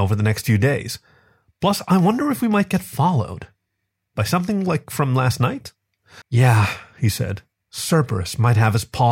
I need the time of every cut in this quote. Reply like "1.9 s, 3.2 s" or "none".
6.2 s, 7.5 s